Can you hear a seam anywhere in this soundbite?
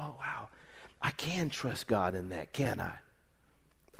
no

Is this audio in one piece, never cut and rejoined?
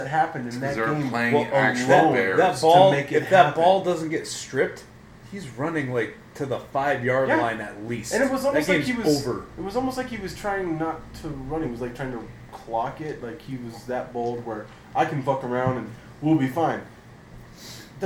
yes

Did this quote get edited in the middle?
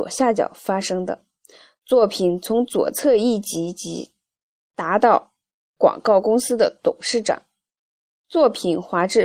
yes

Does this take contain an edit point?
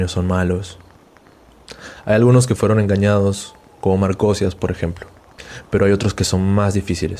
no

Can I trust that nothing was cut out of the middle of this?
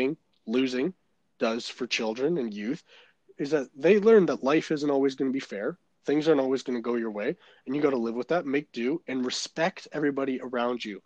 yes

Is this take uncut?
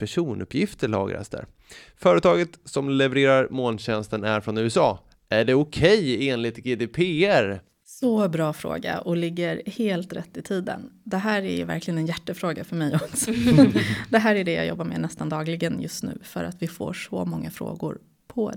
yes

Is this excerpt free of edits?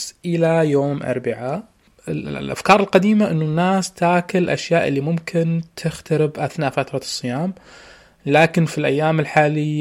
yes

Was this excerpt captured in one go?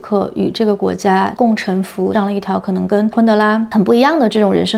no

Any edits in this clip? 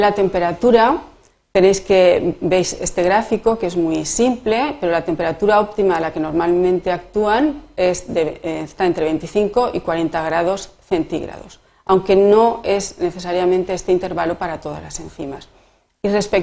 no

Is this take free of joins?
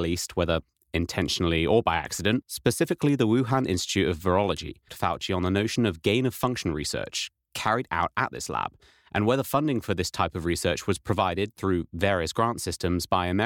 no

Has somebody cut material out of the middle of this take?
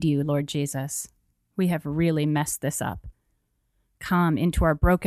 no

